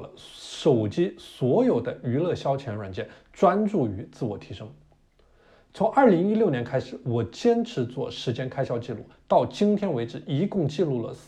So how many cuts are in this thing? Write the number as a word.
zero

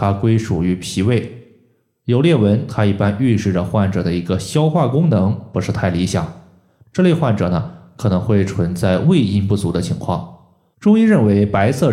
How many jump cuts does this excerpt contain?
two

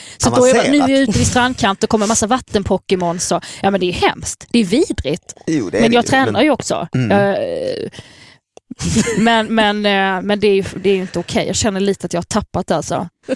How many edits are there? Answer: zero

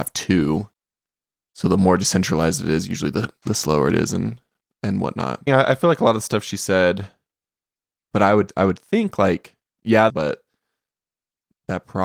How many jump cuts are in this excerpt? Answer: three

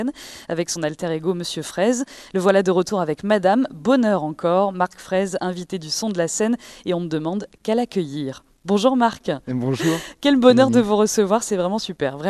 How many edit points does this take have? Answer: zero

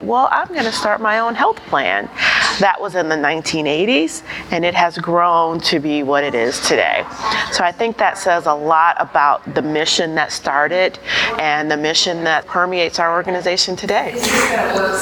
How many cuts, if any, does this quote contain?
one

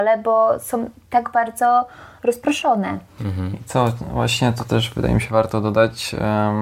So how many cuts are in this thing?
zero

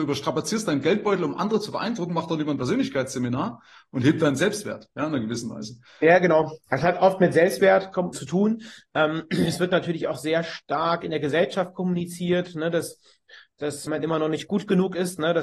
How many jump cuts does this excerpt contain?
two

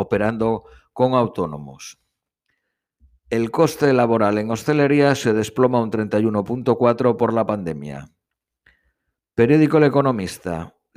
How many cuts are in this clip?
zero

